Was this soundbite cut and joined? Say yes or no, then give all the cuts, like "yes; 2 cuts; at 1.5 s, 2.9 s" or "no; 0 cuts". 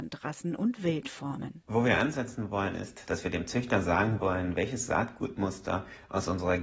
no; 0 cuts